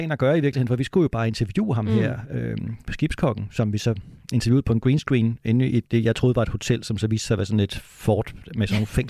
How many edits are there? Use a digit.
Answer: 1